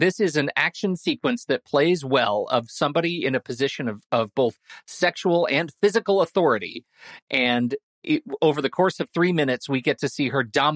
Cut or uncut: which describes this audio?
uncut